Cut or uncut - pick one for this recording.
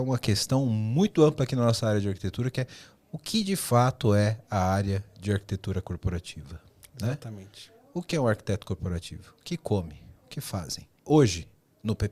cut